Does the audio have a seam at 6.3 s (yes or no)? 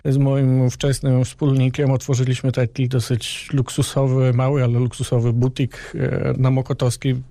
yes